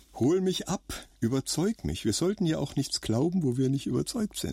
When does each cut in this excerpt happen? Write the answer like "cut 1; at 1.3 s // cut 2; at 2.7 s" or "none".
none